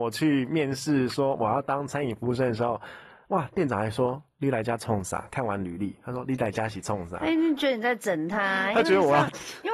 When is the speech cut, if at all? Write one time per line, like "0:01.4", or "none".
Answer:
none